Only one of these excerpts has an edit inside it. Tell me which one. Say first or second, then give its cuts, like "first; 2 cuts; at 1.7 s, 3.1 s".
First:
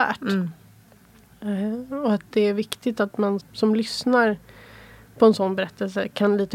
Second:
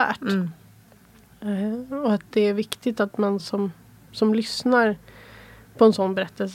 first; 1 cut; at 3.4 s